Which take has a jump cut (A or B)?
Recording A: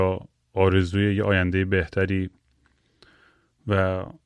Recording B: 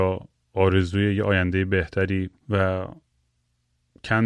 B